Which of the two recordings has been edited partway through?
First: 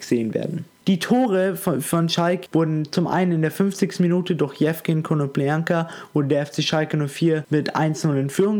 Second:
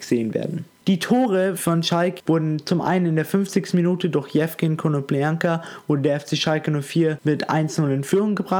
second; 1 cut; at 1.6 s

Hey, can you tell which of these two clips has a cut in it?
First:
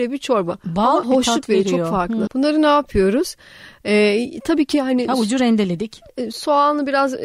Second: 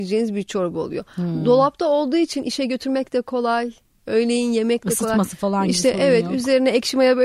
first; 2 cuts; at 1.0 s, 2.3 s

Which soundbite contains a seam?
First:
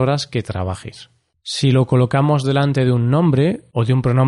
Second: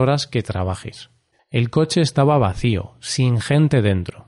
second; 1 cut; at 1.3 s

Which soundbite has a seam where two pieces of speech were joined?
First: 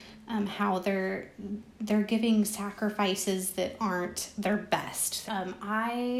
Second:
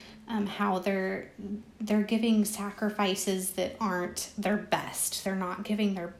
first; 1 cut; at 5.3 s

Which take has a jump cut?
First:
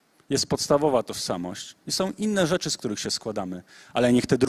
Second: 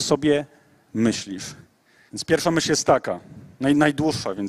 second; 1 cut; at 2.1 s

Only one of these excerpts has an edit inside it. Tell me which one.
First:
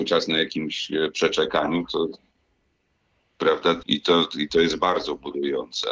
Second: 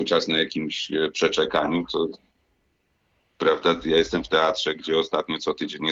first; 1 cut; at 3.8 s

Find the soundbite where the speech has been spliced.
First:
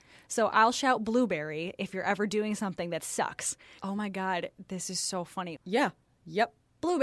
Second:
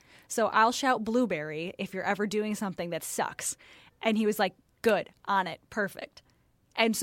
first; 2 cuts; at 3.8 s, 5.6 s

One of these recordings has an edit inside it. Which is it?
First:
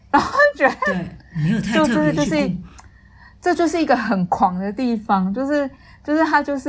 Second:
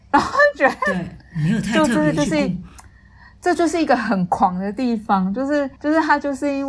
second; 1 cut; at 5.8 s

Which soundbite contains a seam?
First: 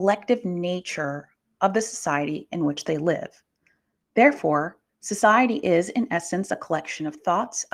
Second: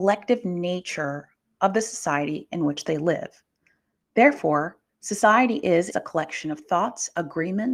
second; 1 cut; at 5.9 s

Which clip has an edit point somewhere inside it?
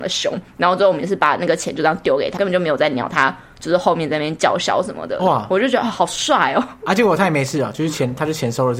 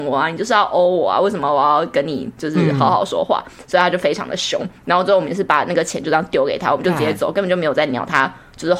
first; 1 cut; at 2.4 s

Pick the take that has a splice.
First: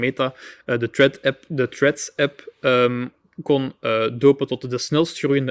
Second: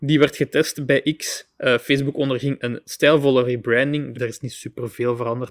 second; 1 cut; at 4.1 s

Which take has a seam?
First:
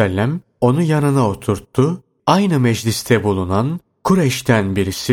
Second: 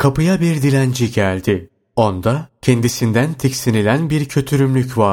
first; 1 cut; at 2.2 s

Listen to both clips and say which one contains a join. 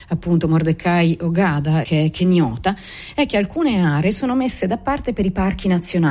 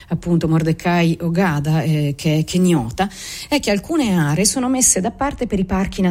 first; 1 cut; at 1.8 s

